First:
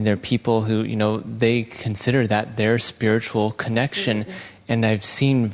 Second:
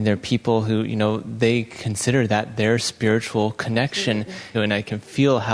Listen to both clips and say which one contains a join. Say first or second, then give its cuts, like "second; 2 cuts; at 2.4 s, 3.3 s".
second; 1 cut; at 4.5 s